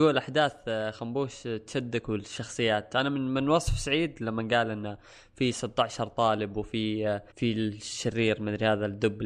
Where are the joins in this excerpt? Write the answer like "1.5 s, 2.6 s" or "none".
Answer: 7.3 s